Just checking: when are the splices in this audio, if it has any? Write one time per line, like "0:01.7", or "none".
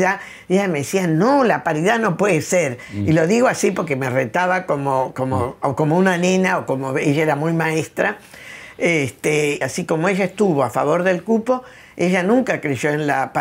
0:09.6